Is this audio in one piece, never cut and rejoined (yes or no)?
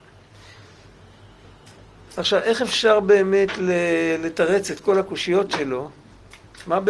yes